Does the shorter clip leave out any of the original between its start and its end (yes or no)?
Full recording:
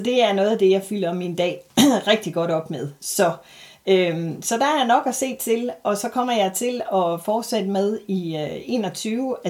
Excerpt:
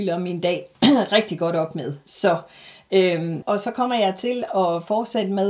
yes